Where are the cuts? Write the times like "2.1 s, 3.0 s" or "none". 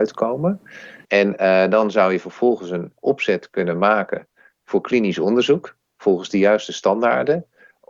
1.0 s